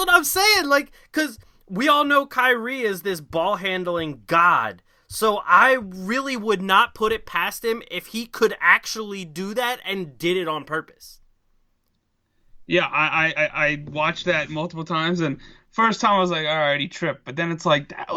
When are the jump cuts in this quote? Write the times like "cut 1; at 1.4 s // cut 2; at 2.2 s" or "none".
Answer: none